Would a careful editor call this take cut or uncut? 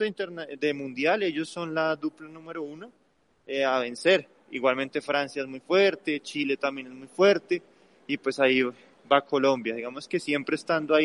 uncut